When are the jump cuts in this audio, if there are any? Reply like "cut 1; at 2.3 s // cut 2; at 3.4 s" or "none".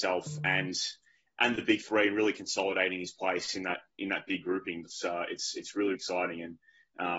cut 1; at 4.9 s // cut 2; at 6.0 s